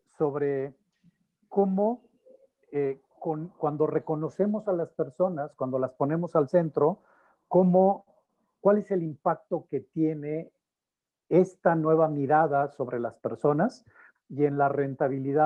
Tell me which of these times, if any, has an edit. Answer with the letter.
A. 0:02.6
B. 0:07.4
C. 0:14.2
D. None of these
C